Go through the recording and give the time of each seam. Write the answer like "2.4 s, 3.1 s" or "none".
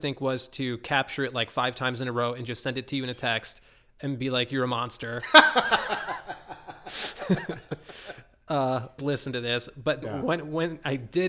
9.0 s, 10.0 s